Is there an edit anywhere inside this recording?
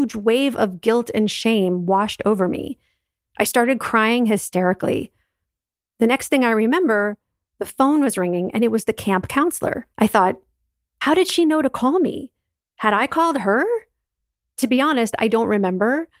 yes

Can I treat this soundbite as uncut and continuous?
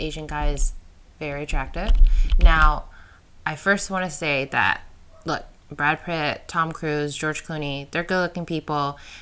yes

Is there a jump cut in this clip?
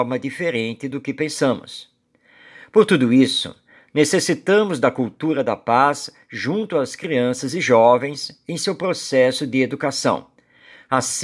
no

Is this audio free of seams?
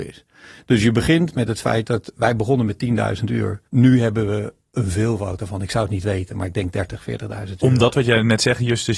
no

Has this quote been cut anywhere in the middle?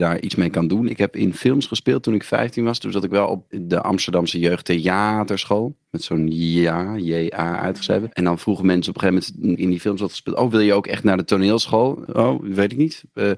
yes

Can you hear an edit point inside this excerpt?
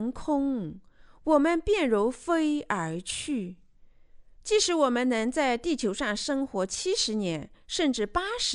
no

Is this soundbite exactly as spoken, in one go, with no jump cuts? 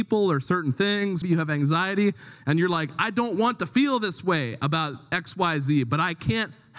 no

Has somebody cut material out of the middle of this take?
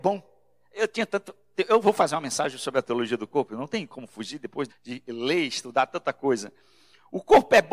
yes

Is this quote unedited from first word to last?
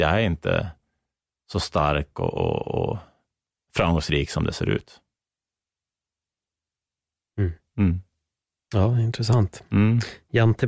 yes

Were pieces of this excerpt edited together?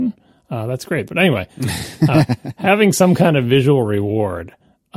yes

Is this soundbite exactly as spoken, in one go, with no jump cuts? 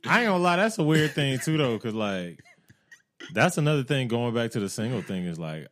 yes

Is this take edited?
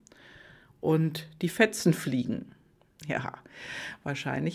yes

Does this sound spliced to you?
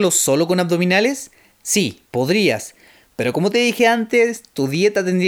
no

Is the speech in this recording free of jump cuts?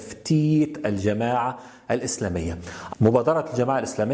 no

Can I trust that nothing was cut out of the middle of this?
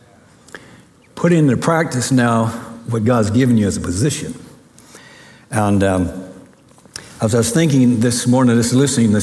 yes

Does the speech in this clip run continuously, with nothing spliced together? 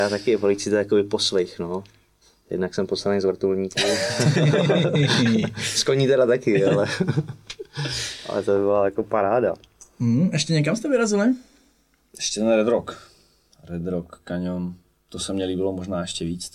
yes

